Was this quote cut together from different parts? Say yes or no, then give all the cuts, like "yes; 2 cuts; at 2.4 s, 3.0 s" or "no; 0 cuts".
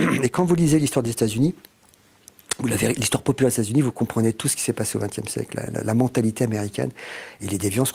yes; 1 cut; at 5.7 s